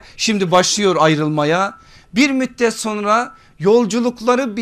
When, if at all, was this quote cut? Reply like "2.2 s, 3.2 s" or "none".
none